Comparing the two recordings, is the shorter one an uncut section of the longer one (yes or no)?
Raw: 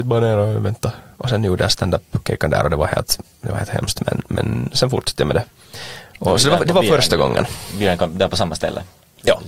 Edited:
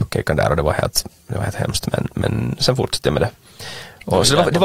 yes